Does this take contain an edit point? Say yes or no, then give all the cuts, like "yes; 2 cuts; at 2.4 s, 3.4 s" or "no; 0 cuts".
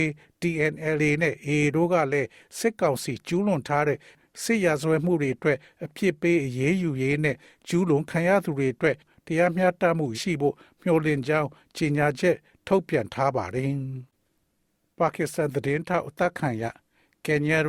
yes; 2 cuts; at 10.1 s, 14.1 s